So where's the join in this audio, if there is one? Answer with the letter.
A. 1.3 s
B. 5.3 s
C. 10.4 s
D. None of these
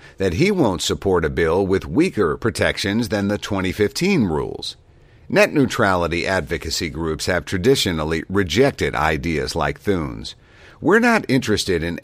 D